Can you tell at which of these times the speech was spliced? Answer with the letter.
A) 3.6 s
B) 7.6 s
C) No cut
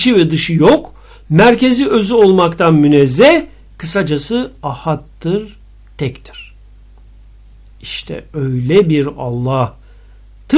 C